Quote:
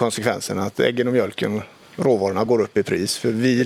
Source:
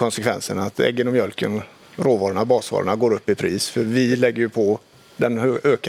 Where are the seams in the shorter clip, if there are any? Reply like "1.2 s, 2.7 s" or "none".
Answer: 2.5 s